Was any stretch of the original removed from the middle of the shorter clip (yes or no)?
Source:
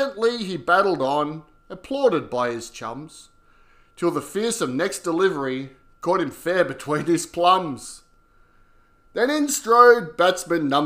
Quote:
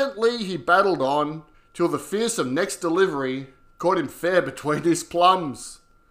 yes